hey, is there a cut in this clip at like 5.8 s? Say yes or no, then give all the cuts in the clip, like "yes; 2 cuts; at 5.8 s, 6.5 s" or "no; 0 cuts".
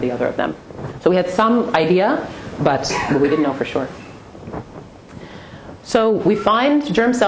yes; 1 cut; at 5.8 s